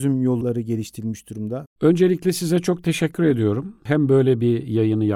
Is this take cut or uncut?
uncut